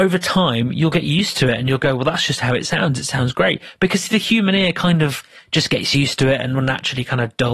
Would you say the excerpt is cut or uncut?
uncut